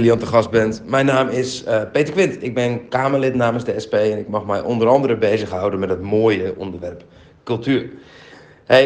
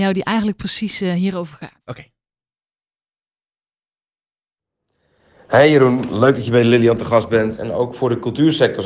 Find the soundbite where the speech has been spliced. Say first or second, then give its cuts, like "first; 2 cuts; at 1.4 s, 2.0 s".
second; 1 cut; at 7.6 s